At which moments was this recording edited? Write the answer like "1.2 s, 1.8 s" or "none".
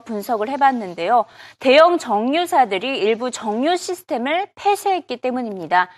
none